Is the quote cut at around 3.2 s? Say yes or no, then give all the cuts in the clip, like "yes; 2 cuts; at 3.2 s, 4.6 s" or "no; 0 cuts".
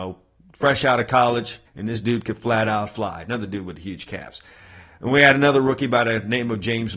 no; 1 cut; at 1.7 s